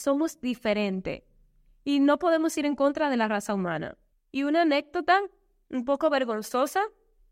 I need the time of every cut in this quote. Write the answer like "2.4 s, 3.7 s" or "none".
4.1 s